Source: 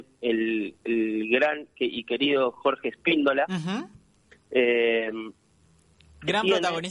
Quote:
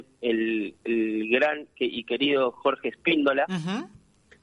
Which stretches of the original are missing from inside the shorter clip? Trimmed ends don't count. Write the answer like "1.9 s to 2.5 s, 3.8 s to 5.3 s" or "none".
none